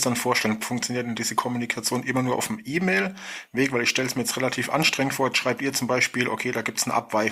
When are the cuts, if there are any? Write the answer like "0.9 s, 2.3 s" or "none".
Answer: none